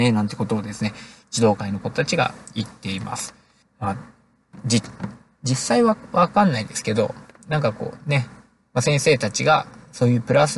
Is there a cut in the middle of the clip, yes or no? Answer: yes